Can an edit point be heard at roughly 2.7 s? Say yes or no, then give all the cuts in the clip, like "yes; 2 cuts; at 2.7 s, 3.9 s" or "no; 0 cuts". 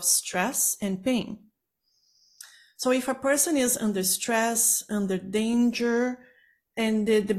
no; 0 cuts